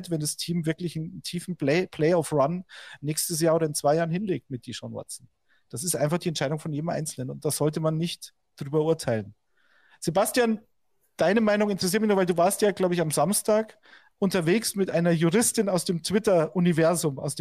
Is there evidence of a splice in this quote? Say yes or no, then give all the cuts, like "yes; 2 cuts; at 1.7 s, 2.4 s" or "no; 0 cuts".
no; 0 cuts